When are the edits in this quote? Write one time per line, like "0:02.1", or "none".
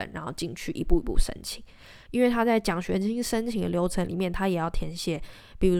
0:02.1